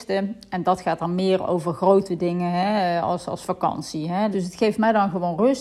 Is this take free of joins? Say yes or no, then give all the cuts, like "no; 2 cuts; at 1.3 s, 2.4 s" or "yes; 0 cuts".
no; 1 cut; at 4.3 s